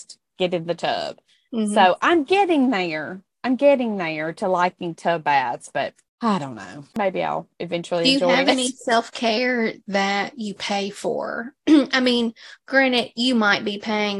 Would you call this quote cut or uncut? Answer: uncut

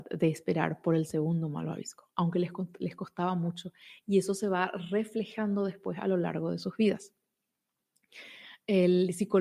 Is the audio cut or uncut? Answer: uncut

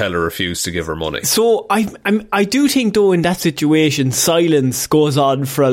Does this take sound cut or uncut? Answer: uncut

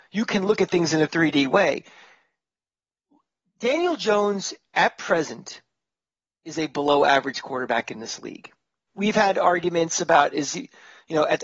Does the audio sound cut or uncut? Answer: cut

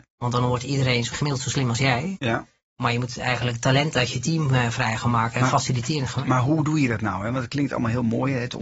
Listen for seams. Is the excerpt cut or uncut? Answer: uncut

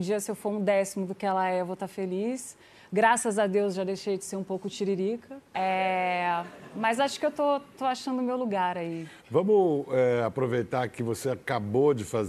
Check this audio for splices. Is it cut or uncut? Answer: cut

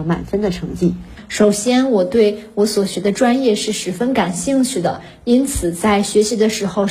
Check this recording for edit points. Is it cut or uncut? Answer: uncut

